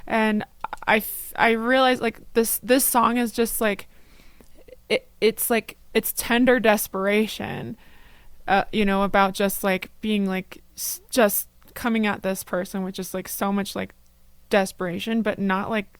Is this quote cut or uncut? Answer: uncut